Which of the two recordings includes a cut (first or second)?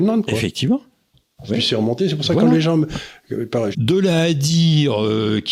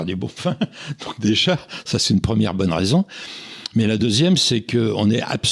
first